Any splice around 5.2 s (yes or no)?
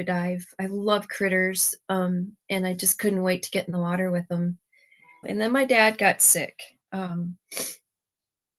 yes